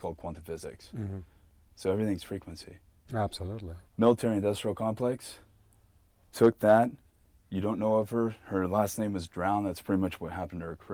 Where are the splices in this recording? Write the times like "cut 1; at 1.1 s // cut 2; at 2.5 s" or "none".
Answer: cut 1; at 3.9 s